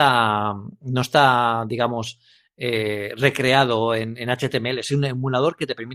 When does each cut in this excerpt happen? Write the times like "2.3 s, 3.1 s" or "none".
none